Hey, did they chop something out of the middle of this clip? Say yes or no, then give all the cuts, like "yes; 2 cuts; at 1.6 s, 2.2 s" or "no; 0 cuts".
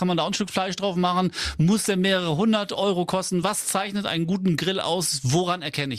no; 0 cuts